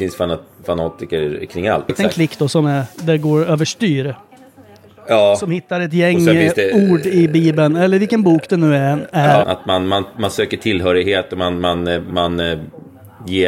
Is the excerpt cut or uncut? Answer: cut